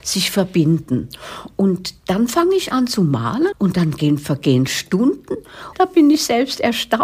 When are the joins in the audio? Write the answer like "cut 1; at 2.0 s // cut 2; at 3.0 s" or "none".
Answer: cut 1; at 3.5 s // cut 2; at 5.7 s